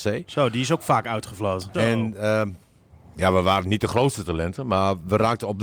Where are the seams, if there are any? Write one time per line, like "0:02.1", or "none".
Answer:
0:01.7